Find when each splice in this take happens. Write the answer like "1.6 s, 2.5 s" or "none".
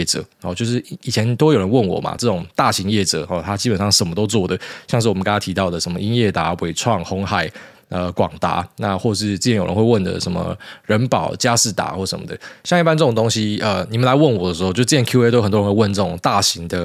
none

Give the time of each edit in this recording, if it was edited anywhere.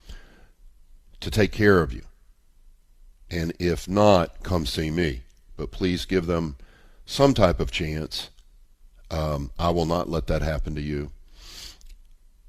none

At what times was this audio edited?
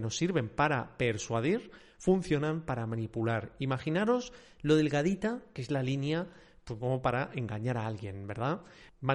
none

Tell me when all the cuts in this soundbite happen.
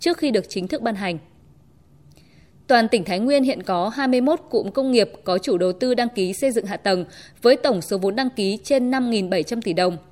none

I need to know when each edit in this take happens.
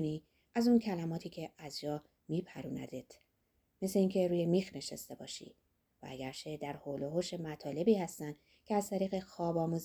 none

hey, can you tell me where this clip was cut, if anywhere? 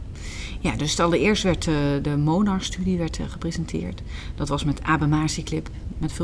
none

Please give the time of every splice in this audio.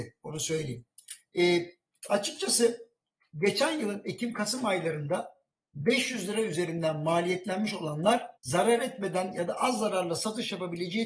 8.4 s

